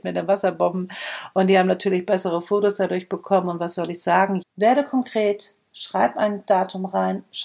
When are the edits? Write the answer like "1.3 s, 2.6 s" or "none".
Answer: 4.4 s